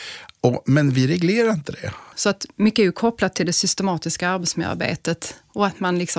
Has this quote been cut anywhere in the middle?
yes; 1 cut; at 2.1 s

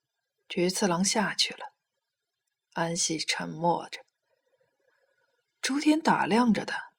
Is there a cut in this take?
no; 0 cuts

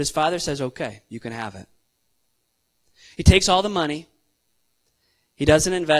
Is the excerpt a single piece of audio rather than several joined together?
yes; 0 cuts

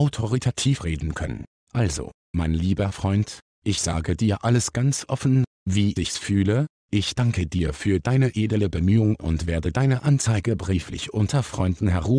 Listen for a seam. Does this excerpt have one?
no; 0 cuts

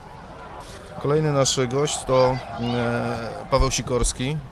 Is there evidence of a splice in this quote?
no; 0 cuts

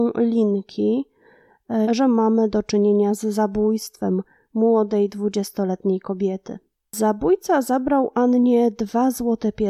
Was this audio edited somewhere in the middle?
yes; 1 cut; at 1.8 s

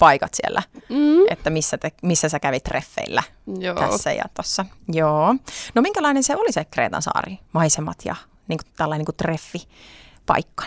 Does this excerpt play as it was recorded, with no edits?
yes; 0 cuts

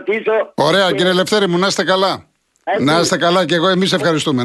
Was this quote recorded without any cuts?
no; 1 cut; at 2.7 s

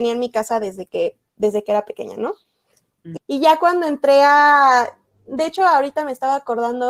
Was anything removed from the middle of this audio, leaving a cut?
yes; 1 cut; at 3.2 s

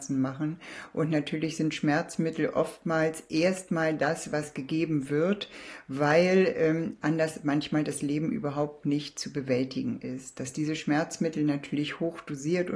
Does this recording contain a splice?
no; 0 cuts

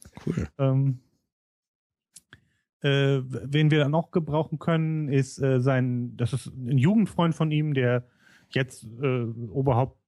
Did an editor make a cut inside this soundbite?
no; 0 cuts

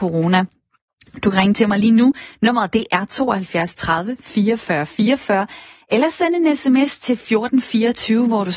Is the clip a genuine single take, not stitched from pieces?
yes; 0 cuts

